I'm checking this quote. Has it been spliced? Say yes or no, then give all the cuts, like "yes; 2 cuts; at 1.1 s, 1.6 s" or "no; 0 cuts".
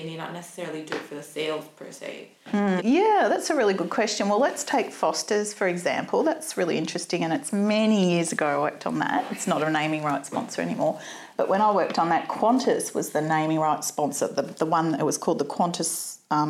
yes; 1 cut; at 2.8 s